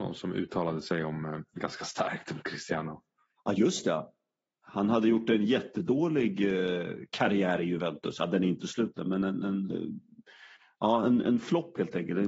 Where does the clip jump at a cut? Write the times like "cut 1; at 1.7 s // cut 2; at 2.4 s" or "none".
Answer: none

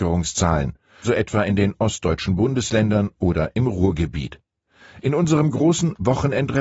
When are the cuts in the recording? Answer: cut 1; at 1.0 s

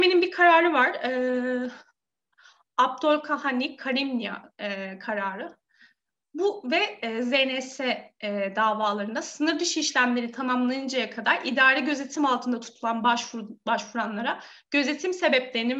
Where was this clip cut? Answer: none

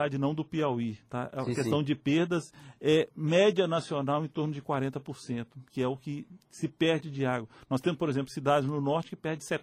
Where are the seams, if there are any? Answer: none

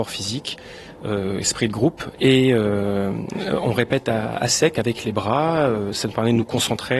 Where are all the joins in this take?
cut 1; at 2.2 s

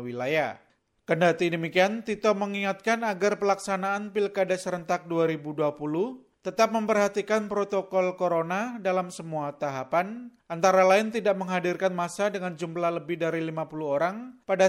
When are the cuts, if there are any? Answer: none

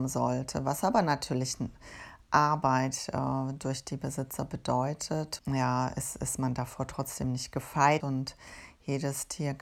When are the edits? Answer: cut 1; at 5.4 s // cut 2; at 8.0 s

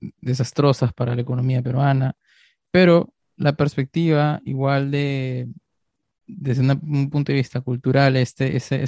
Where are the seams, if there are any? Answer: none

